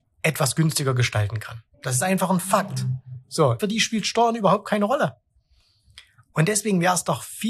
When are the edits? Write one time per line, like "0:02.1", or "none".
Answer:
0:01.7
0:03.6